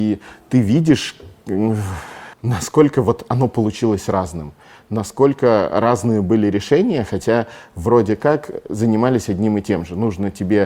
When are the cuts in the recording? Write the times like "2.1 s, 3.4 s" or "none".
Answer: 2.3 s